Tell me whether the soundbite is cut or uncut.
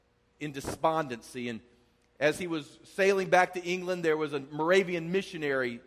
uncut